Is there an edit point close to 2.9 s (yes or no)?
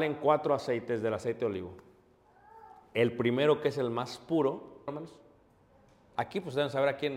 no